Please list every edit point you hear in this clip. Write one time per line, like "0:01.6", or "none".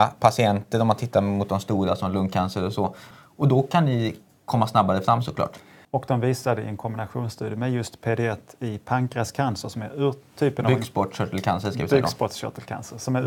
0:03.1
0:05.8